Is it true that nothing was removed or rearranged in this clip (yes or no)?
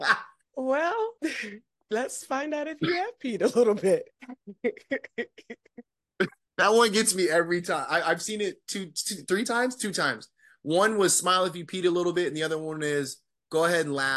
yes